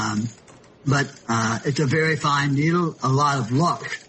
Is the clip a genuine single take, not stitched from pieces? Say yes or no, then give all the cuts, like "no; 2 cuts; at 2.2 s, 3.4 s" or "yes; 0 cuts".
no; 1 cut; at 3.0 s